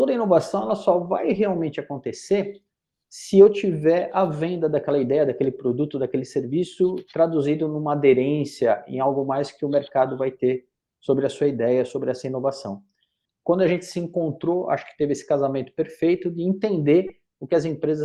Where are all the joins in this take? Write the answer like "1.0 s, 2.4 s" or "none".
13.3 s